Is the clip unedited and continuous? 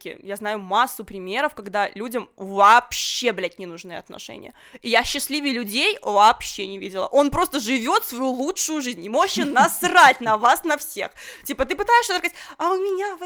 yes; 0 cuts

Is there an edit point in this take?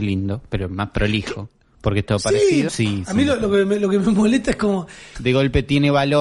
yes; 2 cuts; at 2.7 s, 5.1 s

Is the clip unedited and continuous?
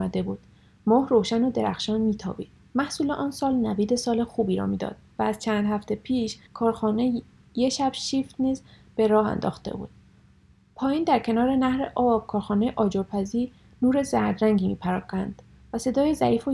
no; 1 cut; at 6.5 s

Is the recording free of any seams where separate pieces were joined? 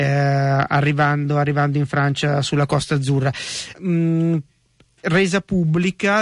no; 1 cut; at 3.7 s

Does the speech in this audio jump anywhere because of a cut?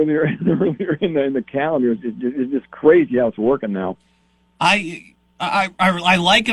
no; 0 cuts

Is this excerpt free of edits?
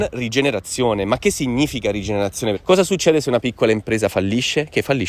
no; 1 cut; at 2.5 s

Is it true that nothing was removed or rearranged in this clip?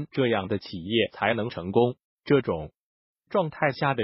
no; 1 cut; at 2.1 s

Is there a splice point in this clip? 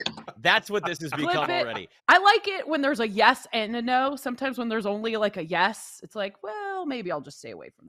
yes; 1 cut; at 2.0 s

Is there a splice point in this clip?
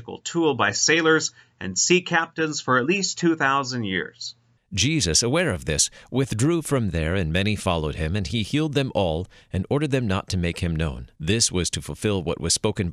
yes; 2 cuts; at 4.6 s, 11.2 s

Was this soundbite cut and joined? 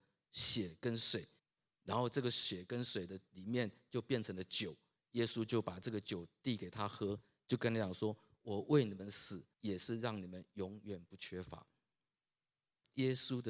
yes; 2 cuts; at 1.4 s, 9.5 s

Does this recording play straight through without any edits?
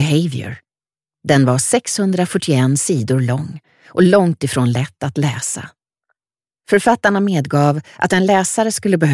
yes; 0 cuts

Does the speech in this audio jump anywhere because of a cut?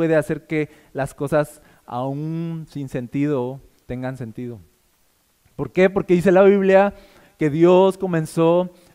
no; 0 cuts

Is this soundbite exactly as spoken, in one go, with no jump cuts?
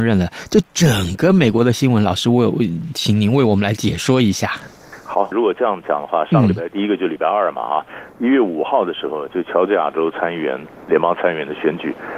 no; 1 cut; at 5.3 s

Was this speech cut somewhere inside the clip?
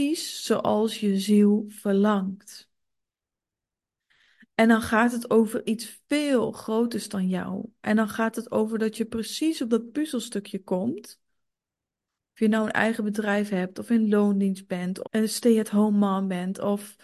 yes; 1 cut; at 15.0 s

